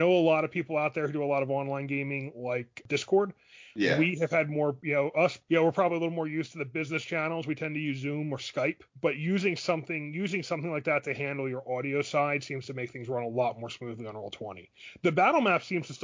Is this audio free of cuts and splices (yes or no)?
yes